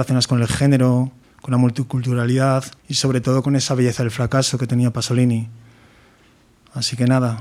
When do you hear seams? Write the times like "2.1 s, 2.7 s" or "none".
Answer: 1.2 s, 2.8 s